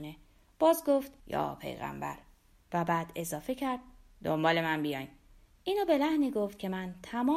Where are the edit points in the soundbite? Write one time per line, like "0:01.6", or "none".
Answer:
0:01.2

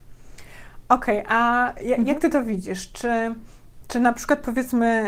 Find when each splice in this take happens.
none

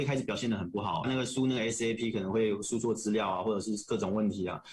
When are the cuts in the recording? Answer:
0:01.0

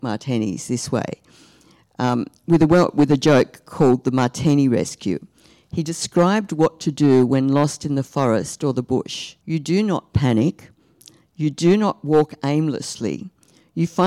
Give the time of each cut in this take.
0:09.4

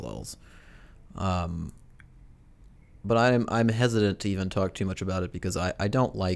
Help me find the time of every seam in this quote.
none

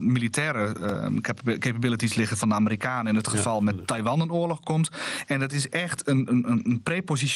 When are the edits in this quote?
none

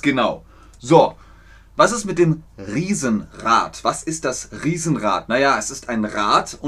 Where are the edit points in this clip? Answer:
none

